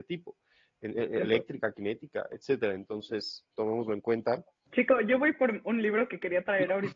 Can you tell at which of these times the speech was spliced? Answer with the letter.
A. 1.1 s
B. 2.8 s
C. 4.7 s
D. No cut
C